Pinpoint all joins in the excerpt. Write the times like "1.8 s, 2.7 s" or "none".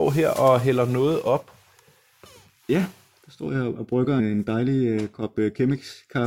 4.2 s